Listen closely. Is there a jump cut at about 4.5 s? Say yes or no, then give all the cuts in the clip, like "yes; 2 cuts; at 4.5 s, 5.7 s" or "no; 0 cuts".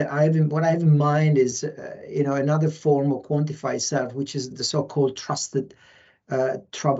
yes; 1 cut; at 4.5 s